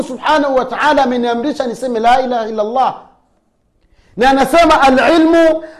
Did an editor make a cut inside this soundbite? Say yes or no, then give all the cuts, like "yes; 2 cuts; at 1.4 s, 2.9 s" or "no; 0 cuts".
no; 0 cuts